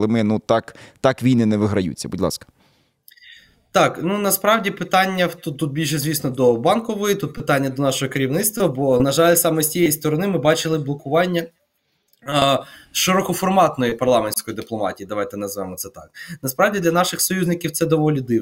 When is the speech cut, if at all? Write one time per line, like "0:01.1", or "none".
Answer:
none